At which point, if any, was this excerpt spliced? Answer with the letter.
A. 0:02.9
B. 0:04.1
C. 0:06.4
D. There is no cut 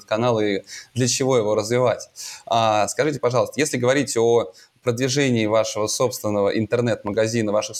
D